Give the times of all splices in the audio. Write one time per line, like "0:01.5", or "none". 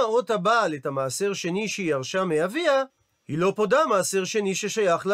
none

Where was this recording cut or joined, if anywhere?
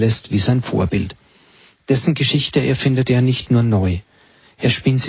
none

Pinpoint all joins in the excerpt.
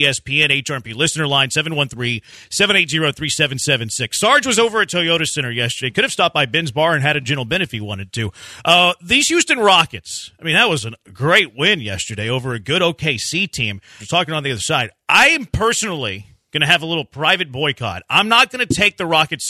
0:14.0

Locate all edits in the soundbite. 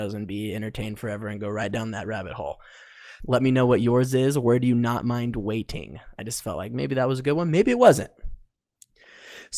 0:03.2

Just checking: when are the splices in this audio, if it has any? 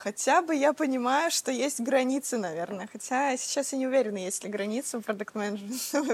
none

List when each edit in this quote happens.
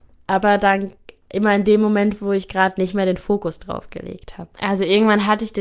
0:04.5

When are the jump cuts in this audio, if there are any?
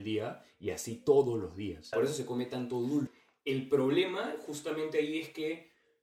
0:01.9
0:03.1

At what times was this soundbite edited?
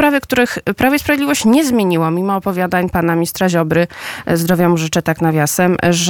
none

